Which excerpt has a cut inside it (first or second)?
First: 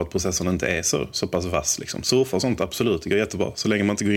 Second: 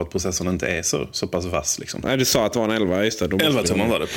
second